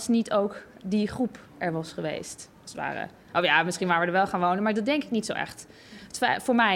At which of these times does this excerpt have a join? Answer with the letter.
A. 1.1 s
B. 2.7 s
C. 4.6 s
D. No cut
D